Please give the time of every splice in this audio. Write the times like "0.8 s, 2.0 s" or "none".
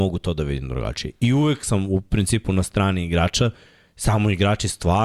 none

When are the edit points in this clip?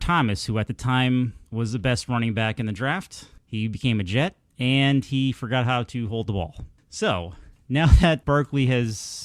1.5 s, 8.2 s

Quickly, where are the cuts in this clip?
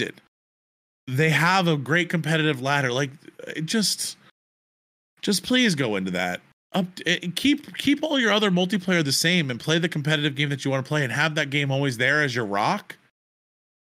none

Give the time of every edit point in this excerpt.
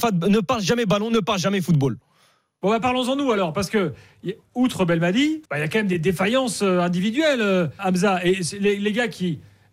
5.5 s, 7.8 s

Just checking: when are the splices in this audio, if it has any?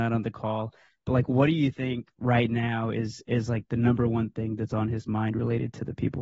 none

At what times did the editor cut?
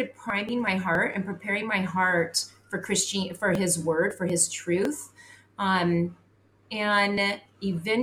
none

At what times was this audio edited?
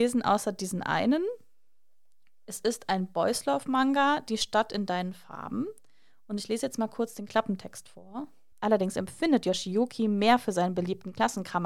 8.5 s

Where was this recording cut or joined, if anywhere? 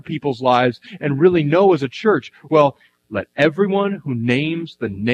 none

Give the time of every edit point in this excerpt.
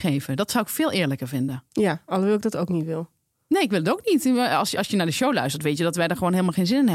none

